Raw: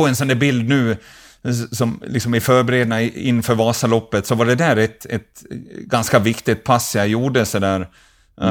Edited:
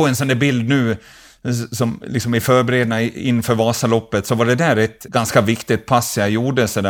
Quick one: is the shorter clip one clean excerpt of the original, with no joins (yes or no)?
no